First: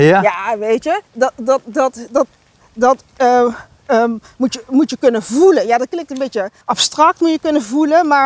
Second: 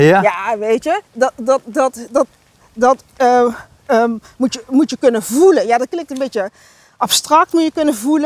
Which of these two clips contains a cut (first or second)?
first